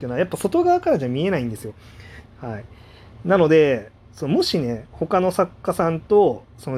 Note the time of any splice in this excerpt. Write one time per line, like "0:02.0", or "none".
0:02.3